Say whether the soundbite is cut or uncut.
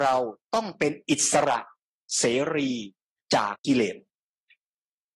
cut